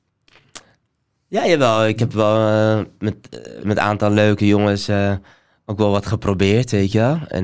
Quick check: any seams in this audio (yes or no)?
yes